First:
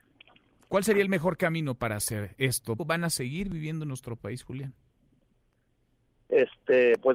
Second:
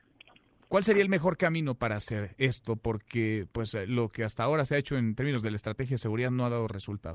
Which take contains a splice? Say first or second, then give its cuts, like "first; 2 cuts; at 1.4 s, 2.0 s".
first; 1 cut; at 2.8 s